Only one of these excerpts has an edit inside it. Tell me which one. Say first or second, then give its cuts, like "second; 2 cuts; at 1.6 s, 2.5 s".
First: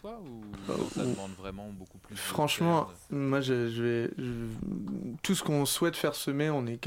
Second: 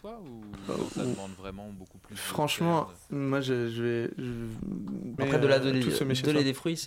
second; 1 cut; at 5.2 s